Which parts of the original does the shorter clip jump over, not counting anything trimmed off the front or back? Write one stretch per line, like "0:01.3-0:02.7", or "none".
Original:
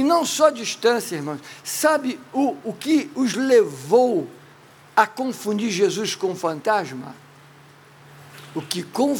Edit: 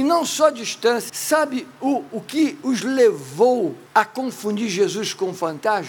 0:01.1-0:01.6
0:04.4-0:04.9